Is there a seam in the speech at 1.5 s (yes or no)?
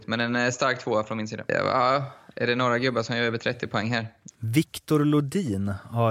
yes